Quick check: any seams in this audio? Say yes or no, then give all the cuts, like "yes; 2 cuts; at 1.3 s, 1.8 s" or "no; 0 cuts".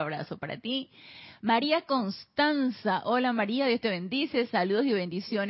no; 0 cuts